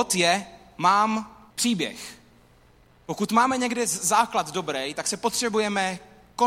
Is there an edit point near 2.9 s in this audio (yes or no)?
no